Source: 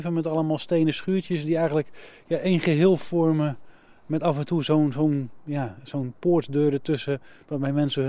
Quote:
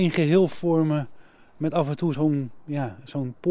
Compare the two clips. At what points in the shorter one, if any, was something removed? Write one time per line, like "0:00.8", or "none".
0:02.1